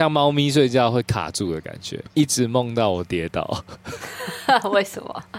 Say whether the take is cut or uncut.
cut